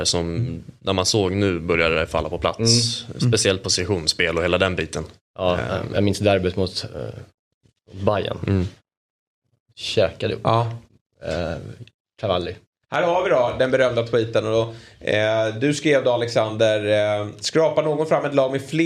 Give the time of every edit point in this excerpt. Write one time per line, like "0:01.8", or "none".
none